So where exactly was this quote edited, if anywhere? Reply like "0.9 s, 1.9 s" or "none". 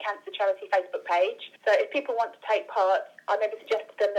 1.6 s